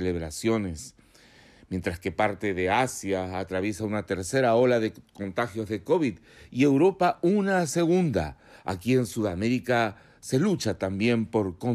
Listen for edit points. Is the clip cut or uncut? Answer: uncut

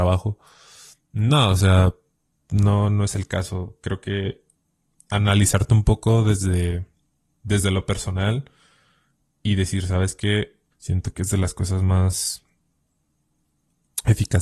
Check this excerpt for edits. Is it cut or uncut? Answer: cut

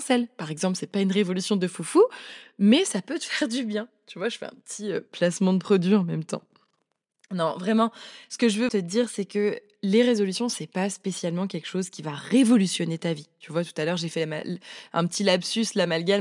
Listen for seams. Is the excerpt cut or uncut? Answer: cut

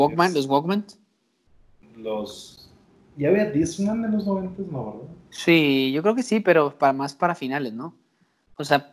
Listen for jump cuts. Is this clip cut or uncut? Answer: uncut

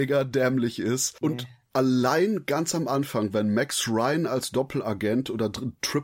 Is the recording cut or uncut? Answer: cut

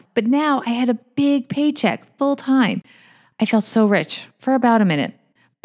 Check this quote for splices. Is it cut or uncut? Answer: uncut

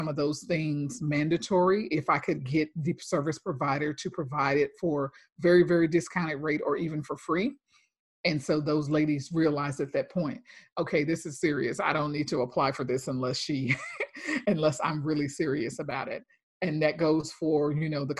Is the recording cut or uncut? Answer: uncut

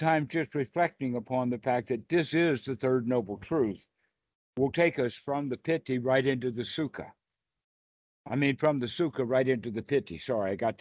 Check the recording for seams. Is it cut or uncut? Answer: uncut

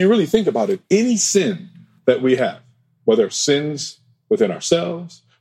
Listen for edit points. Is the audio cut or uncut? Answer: uncut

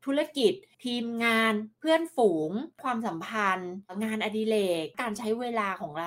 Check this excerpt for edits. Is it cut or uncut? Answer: uncut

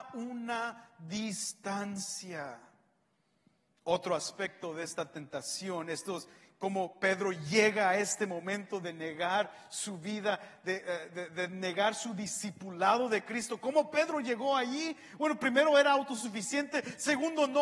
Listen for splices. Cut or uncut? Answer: cut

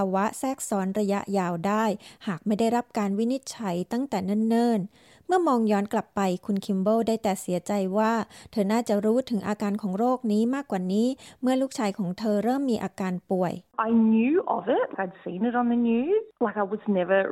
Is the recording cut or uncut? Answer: cut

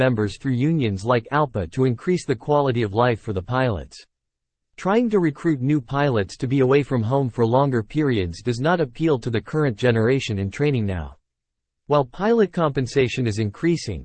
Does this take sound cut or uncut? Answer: uncut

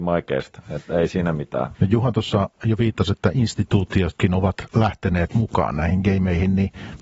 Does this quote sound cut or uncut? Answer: cut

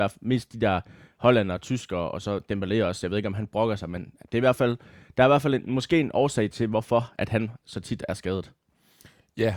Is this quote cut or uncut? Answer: uncut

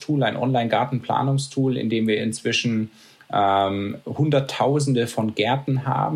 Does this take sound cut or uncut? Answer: uncut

